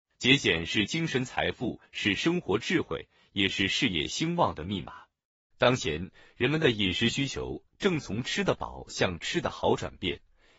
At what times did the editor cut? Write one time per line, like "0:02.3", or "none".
0:05.5